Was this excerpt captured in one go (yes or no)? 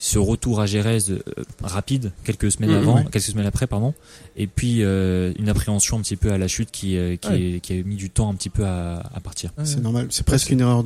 yes